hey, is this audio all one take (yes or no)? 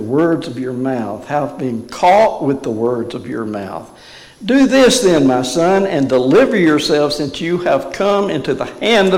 yes